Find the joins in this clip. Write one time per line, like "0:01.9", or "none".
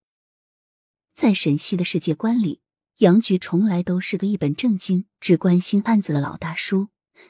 none